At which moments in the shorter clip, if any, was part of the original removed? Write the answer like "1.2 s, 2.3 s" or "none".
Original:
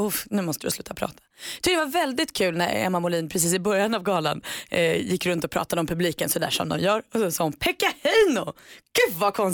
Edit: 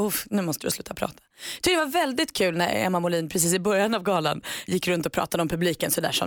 4.7 s